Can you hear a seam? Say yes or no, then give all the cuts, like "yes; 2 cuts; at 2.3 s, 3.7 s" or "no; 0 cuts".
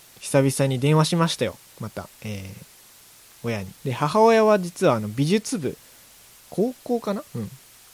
yes; 2 cuts; at 2.1 s, 3.8 s